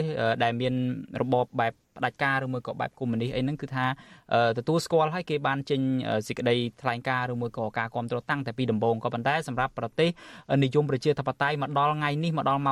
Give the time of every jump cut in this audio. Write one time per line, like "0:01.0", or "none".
0:01.5